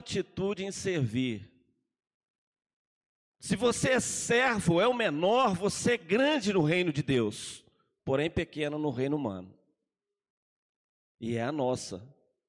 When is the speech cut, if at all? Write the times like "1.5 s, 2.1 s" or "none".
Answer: 11.1 s